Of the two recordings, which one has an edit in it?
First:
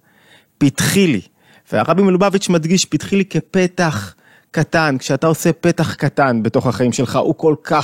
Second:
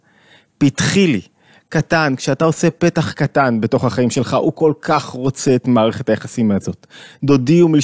second; 1 cut; at 1.6 s

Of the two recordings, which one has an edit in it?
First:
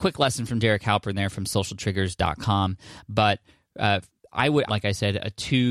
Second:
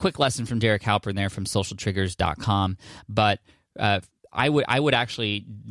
first; 1 cut; at 4.7 s

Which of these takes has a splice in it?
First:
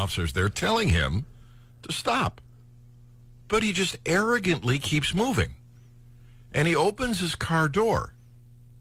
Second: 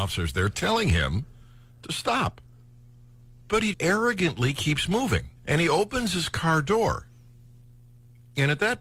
second; 2 cuts; at 3.7 s, 5.4 s

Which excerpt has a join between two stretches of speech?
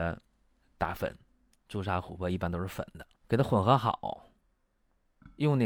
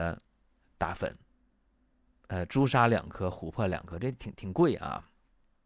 first; 2 cuts; at 1.5 s, 3.2 s

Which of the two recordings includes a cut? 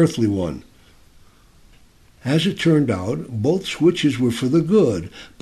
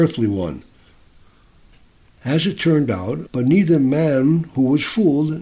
second; 1 cut; at 3.3 s

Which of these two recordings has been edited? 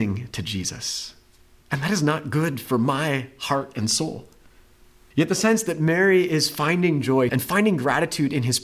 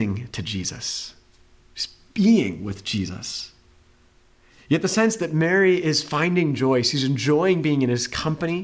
first; 3 cuts; at 1.6 s, 5.1 s, 7.3 s

